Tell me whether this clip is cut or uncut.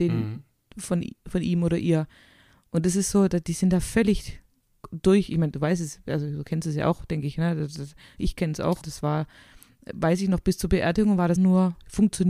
cut